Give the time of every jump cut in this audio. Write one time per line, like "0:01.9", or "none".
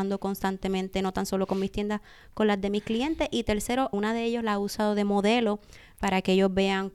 0:03.9

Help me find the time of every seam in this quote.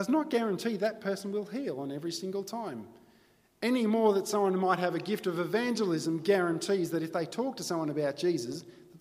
none

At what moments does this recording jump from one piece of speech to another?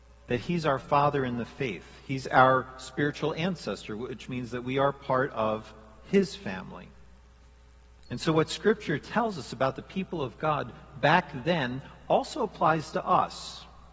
none

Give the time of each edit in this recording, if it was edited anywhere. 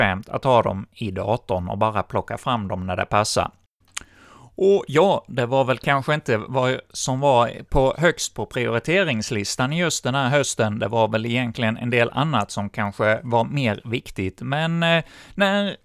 none

